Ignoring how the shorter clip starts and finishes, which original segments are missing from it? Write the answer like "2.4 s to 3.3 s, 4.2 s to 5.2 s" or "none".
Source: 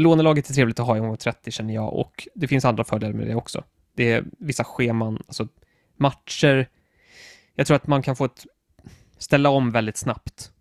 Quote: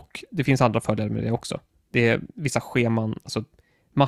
none